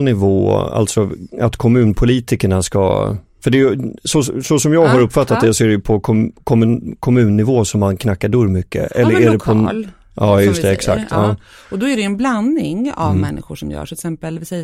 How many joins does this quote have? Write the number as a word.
zero